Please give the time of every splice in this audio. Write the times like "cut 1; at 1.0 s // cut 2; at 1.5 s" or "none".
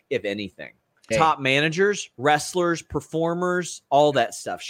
cut 1; at 1.1 s